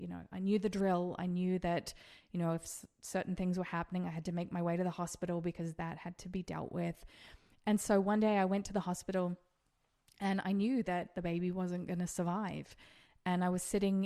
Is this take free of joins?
yes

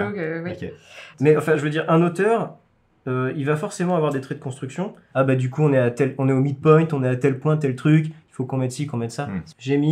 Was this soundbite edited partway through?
yes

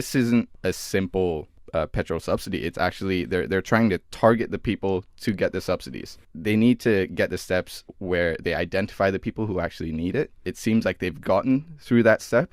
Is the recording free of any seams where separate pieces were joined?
yes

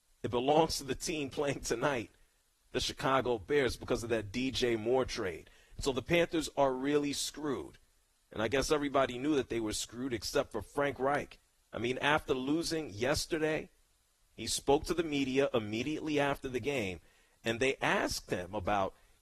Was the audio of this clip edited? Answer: no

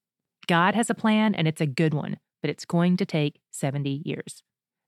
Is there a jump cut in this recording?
no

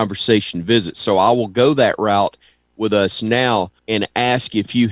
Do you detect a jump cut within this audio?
yes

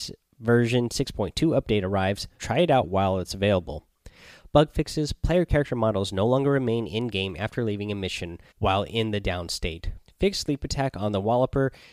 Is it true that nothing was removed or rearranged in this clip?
no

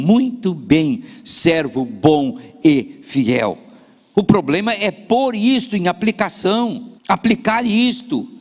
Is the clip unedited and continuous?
no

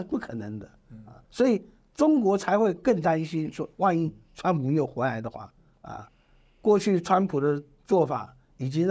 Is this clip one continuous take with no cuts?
yes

